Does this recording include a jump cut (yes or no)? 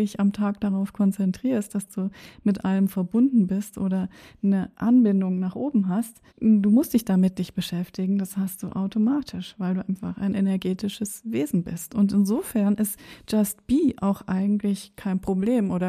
yes